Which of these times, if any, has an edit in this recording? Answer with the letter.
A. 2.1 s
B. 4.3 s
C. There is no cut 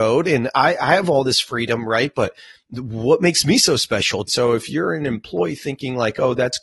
B